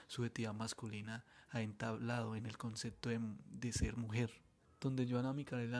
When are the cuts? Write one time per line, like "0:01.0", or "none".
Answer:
0:04.6